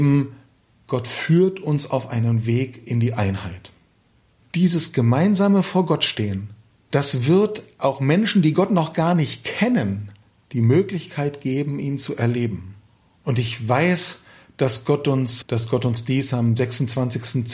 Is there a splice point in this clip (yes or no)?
yes